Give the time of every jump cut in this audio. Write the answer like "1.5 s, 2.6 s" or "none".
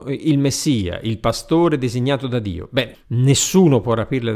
2.9 s